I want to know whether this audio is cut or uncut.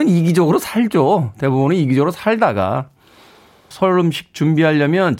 cut